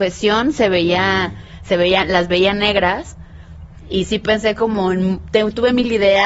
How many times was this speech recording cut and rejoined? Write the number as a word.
zero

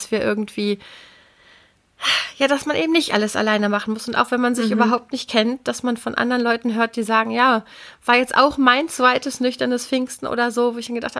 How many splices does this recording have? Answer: zero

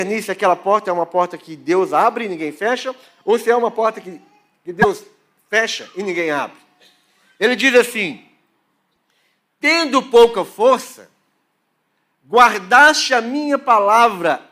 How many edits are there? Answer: zero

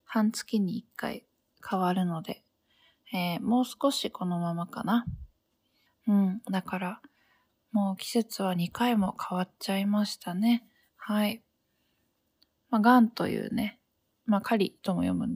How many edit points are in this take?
two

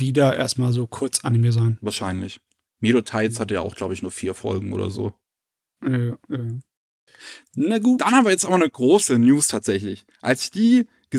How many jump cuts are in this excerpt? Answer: zero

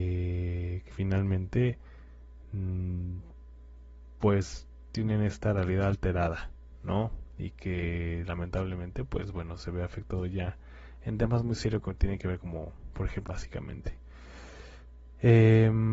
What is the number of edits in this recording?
two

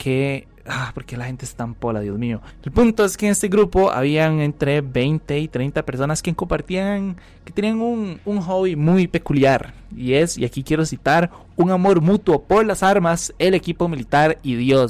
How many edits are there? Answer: zero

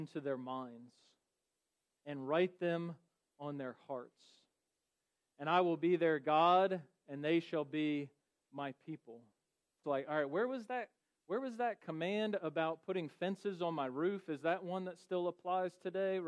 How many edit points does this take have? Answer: one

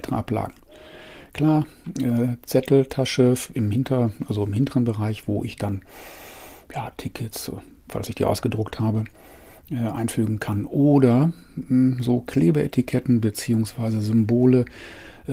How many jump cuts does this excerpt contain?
zero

